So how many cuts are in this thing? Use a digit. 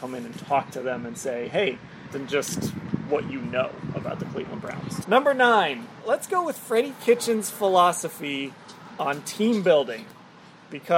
2